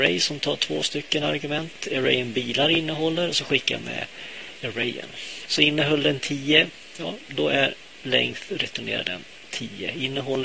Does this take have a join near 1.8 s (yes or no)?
no